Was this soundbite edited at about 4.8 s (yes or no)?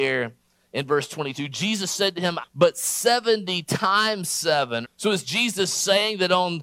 yes